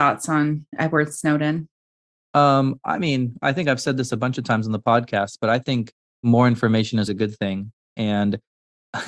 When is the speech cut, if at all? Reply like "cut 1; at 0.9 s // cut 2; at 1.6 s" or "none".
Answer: cut 1; at 7.1 s